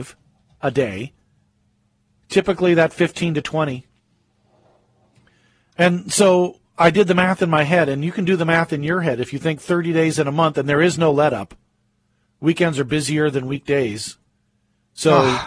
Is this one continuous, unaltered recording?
yes; 0 cuts

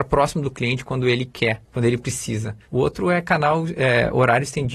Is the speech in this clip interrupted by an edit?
yes; 1 cut; at 1.7 s

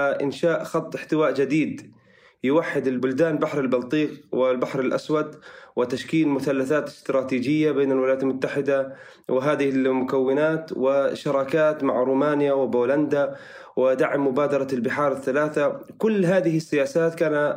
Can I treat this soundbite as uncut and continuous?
yes; 0 cuts

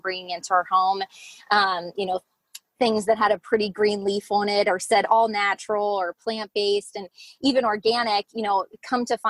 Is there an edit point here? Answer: no; 0 cuts

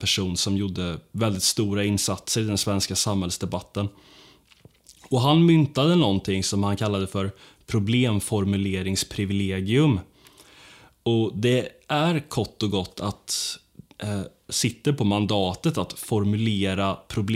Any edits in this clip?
yes; 1 cut; at 14.5 s

